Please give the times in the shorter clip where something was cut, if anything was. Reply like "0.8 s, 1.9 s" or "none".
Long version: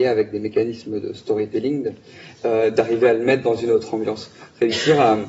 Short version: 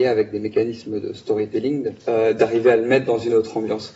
2.0 s